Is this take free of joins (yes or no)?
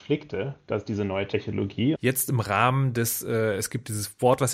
no